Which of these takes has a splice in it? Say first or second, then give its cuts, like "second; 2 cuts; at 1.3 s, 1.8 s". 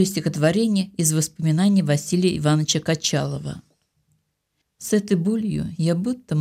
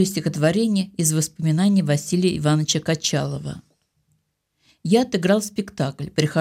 first; 1 cut; at 4.6 s